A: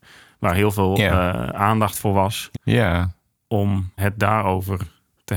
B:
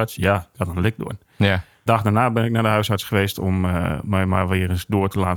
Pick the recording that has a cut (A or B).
A